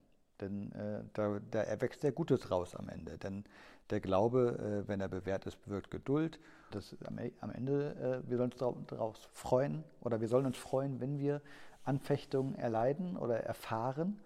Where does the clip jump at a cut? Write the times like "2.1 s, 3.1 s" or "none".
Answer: 6.7 s, 9.3 s